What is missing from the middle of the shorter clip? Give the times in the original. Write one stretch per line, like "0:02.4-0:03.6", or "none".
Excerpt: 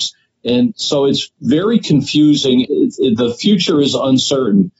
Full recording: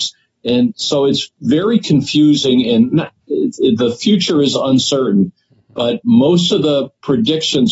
0:02.6-0:03.2